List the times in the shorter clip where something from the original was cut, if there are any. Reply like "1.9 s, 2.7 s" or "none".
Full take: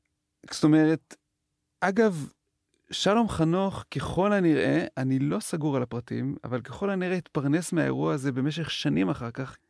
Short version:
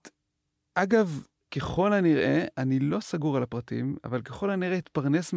1.5 s